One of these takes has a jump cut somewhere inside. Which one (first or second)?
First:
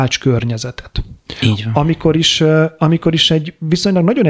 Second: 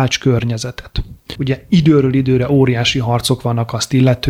second